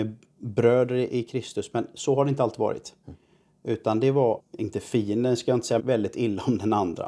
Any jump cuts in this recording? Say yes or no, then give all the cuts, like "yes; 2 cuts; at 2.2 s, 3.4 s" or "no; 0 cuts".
yes; 2 cuts; at 4.4 s, 5.8 s